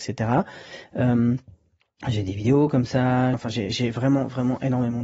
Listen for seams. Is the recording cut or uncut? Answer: cut